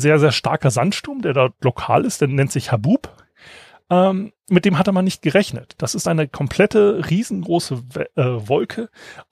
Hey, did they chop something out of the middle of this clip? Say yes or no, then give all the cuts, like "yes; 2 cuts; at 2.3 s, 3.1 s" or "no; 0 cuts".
no; 0 cuts